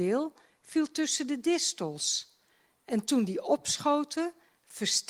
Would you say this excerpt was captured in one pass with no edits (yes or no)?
yes